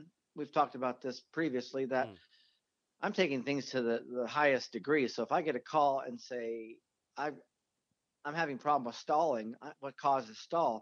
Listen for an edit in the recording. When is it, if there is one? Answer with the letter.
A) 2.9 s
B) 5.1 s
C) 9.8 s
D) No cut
C